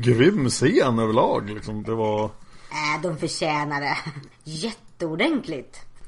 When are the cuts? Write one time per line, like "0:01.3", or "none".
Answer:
0:04.3